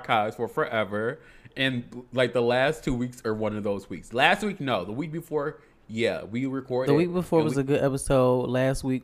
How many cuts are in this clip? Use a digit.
0